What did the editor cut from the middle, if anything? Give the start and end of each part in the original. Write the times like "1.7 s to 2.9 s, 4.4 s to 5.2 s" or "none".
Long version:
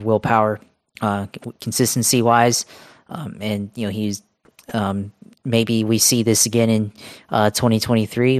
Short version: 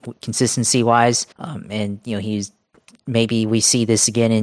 2.7 s to 3.0 s, 4.6 s to 5.3 s